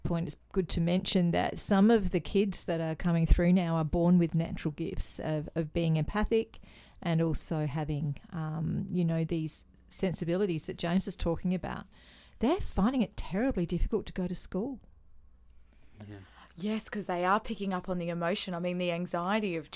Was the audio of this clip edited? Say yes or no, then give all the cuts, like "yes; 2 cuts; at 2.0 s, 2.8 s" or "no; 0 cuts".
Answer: no; 0 cuts